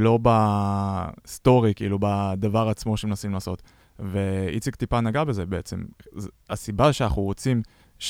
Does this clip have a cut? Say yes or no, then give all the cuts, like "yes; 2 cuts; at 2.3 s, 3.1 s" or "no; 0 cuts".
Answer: no; 0 cuts